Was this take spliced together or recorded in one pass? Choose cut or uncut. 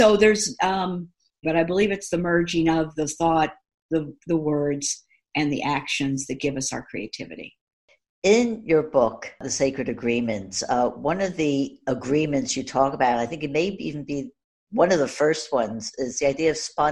cut